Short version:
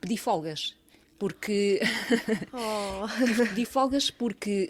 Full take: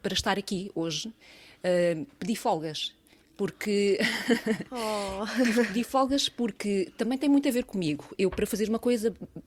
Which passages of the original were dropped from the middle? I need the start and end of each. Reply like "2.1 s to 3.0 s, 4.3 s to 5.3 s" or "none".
none